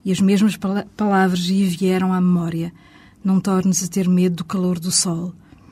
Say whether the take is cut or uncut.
uncut